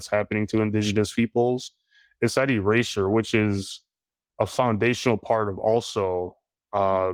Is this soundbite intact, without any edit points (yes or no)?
yes